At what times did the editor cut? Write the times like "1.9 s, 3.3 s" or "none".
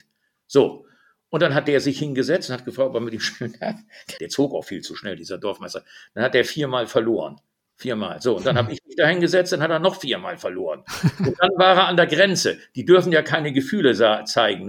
4.2 s